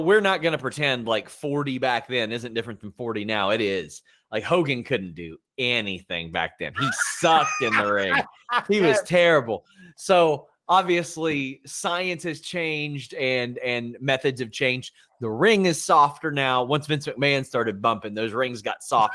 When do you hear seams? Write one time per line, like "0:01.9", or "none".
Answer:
none